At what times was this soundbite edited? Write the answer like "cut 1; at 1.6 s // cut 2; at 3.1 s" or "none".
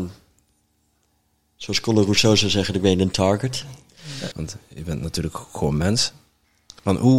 cut 1; at 4.3 s